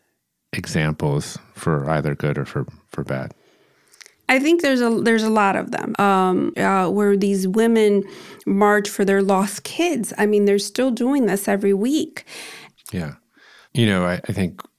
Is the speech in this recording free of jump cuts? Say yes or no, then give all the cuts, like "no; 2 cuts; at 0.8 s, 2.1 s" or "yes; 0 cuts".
no; 2 cuts; at 6.5 s, 12.7 s